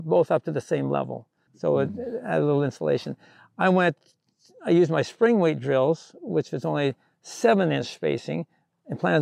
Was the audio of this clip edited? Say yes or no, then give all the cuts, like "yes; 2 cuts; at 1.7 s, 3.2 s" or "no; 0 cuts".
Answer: yes; 1 cut; at 1.5 s